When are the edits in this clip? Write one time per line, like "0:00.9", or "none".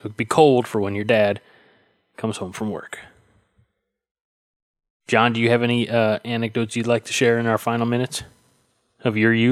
none